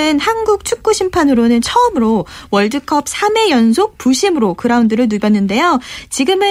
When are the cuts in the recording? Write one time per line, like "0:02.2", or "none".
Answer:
none